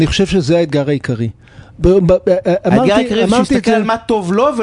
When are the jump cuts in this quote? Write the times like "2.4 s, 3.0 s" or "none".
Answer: none